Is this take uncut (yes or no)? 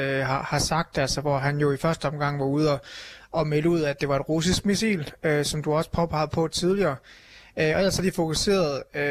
yes